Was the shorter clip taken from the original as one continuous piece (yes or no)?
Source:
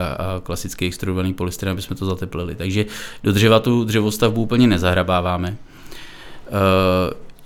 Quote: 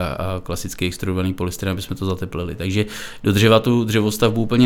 yes